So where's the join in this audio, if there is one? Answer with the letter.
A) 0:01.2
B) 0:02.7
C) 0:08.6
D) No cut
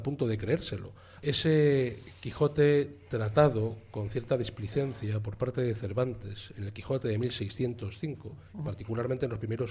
A